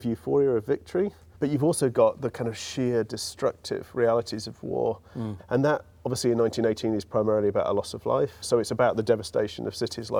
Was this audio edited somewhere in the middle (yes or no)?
yes